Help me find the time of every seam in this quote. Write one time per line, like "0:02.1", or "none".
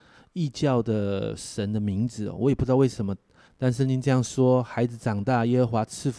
0:03.5